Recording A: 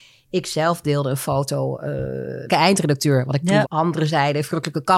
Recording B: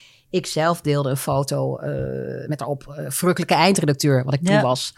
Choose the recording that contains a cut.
A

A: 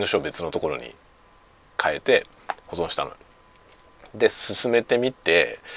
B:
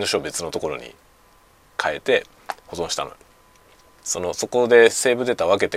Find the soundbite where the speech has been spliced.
B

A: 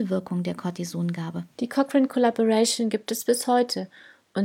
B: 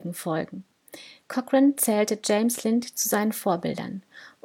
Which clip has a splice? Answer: A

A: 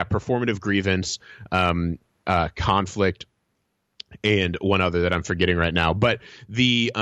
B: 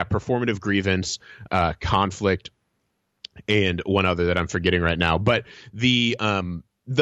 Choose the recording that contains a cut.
B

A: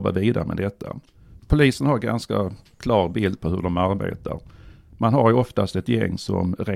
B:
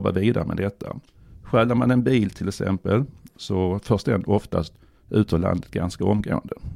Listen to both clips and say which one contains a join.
A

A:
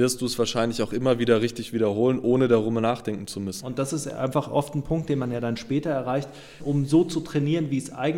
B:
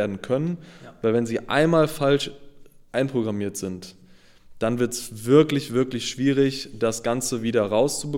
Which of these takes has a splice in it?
A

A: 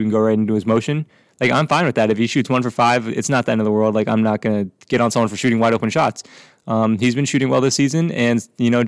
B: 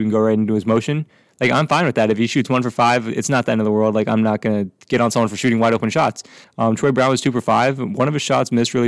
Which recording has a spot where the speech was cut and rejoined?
B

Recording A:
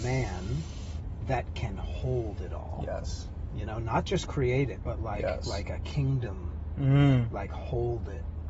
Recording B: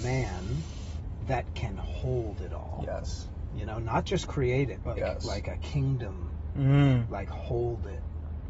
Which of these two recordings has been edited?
B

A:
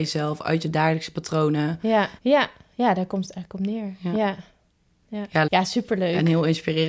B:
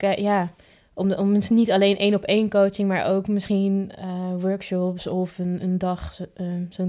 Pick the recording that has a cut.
A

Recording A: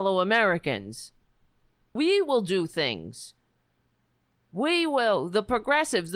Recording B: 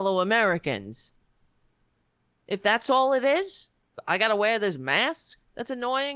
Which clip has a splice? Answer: A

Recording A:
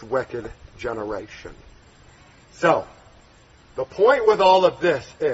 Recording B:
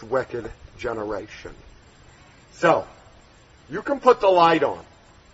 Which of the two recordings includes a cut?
B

